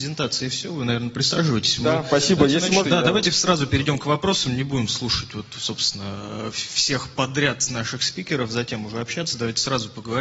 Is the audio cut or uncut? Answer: cut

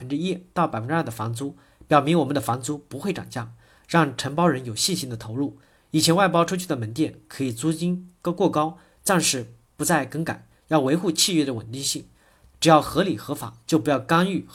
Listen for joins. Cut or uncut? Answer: cut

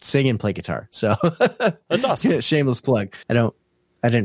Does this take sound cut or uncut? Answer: cut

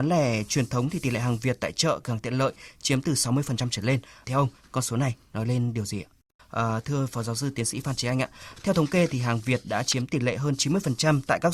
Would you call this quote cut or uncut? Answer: cut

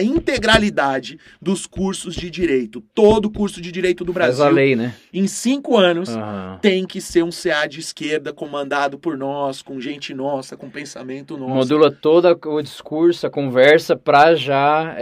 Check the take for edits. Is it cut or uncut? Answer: uncut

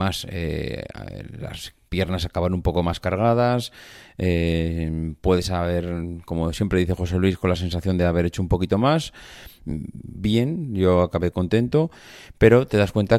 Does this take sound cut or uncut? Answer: uncut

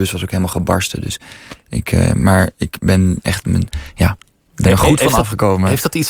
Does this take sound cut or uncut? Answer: uncut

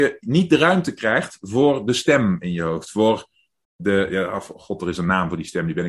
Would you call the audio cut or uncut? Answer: uncut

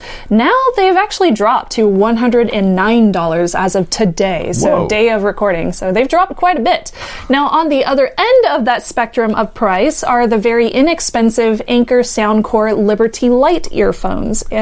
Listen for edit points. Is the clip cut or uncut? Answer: uncut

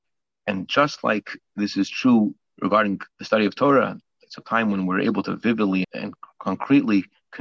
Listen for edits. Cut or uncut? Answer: cut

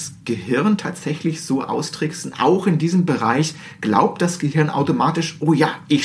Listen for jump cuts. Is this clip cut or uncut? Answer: uncut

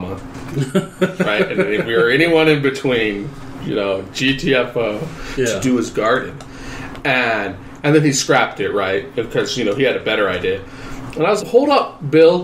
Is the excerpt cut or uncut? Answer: cut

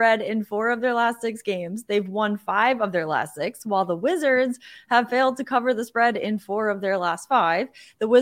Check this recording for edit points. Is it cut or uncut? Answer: uncut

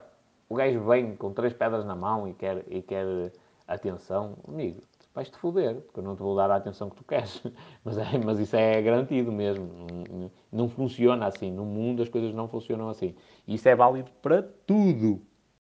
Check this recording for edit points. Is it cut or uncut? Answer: uncut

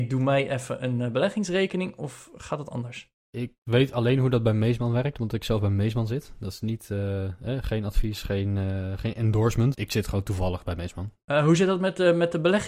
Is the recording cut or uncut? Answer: cut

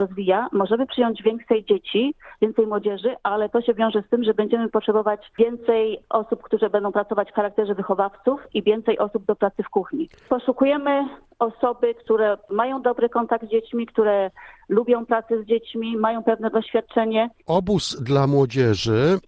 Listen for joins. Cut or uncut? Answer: cut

